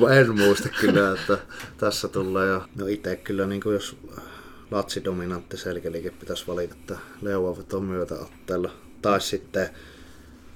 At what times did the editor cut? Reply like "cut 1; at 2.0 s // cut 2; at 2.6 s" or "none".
cut 1; at 2.7 s // cut 2; at 6.7 s